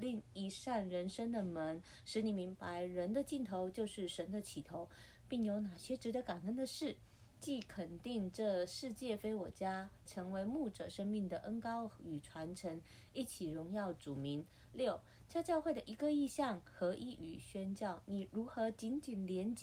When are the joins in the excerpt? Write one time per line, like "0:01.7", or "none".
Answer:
0:10.1